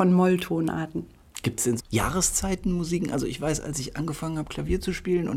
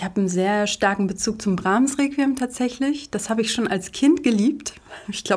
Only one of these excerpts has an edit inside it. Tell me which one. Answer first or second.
first